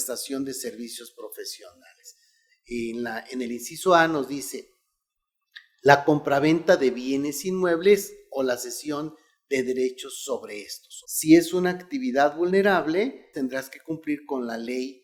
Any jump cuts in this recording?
yes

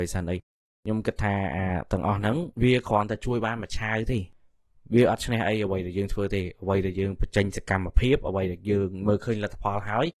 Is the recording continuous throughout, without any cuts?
no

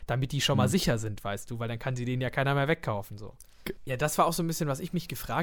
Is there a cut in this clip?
yes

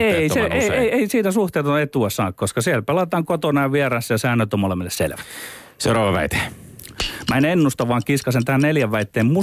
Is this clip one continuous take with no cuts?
yes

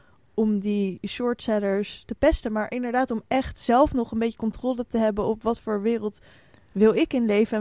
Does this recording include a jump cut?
no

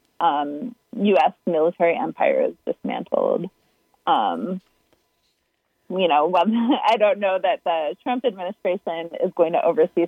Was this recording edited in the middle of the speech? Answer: no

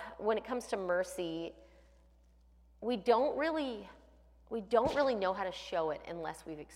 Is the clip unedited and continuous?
yes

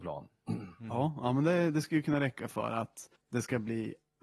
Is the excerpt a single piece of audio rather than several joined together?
no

